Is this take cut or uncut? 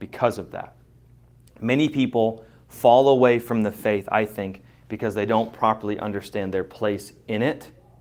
uncut